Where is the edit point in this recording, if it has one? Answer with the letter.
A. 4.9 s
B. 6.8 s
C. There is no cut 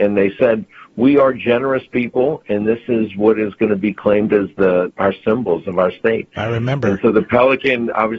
A